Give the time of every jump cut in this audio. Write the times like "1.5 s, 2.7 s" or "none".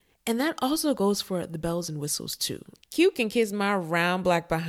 2.8 s